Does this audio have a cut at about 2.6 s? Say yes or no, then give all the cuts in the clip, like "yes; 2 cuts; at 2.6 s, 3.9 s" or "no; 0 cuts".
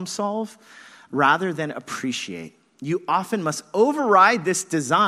no; 0 cuts